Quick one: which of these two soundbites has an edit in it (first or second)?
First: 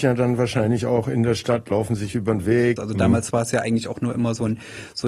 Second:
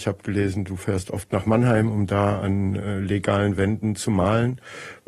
first